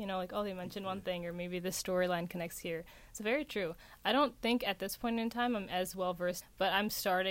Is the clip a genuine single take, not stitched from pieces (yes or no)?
no